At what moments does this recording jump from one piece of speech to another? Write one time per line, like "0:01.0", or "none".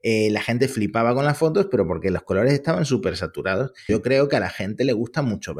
0:03.9

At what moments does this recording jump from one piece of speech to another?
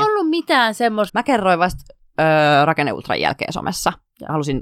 0:01.1

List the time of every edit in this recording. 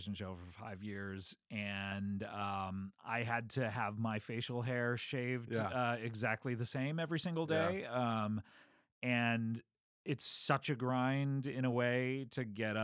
none

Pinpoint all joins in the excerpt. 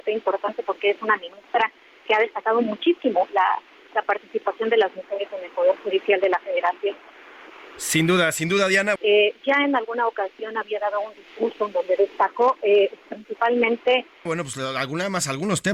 0:09.0
0:14.3

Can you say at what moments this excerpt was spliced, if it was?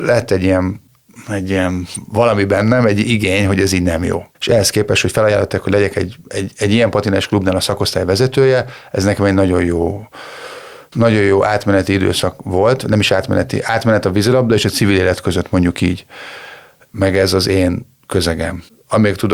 0:16.9

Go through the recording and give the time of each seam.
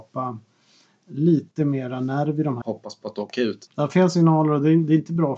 0:02.6
0:03.7

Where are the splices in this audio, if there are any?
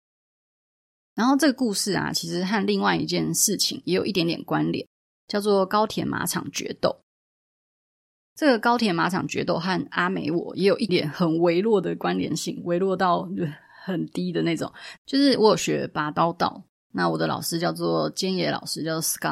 0:10.9
0:15.0

